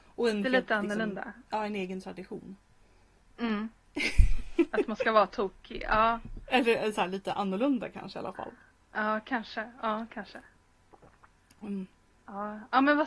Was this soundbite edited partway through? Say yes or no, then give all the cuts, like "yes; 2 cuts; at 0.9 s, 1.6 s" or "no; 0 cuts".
yes; 1 cut; at 3.2 s